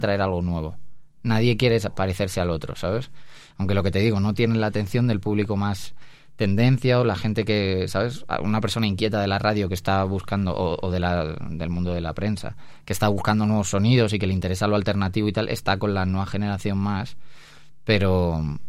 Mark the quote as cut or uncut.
cut